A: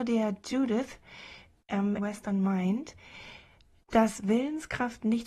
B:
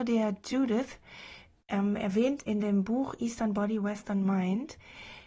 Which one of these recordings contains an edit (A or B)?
A